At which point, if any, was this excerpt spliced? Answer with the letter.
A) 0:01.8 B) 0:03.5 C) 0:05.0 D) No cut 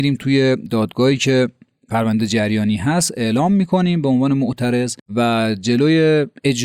C